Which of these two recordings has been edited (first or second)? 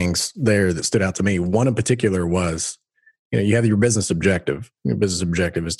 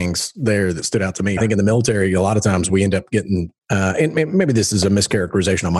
second